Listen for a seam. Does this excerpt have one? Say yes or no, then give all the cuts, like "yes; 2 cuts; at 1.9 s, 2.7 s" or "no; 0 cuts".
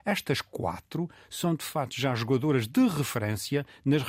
no; 0 cuts